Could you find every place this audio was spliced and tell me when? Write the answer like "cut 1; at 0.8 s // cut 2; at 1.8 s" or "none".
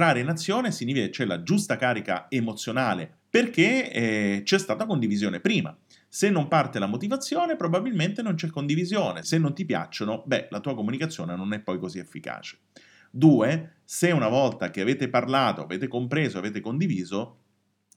cut 1; at 3.2 s // cut 2; at 9.2 s